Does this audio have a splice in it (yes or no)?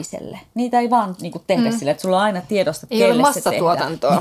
no